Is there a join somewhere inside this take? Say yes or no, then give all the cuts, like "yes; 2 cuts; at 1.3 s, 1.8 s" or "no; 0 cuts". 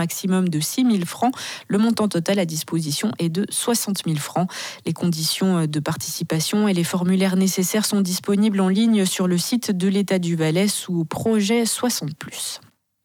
no; 0 cuts